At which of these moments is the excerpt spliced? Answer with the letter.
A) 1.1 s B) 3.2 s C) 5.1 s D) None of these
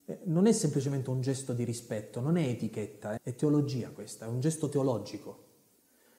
B